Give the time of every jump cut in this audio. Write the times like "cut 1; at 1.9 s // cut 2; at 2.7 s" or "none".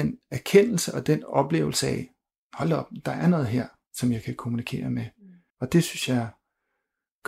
cut 1; at 5.5 s